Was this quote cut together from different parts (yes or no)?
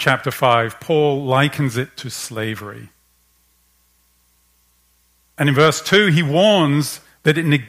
no